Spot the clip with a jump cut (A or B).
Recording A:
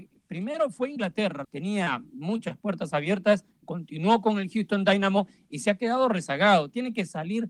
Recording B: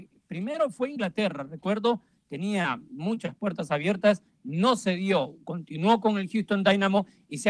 A